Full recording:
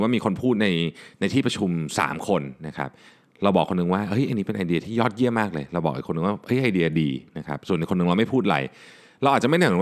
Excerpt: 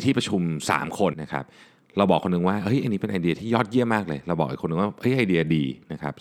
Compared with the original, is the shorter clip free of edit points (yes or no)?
no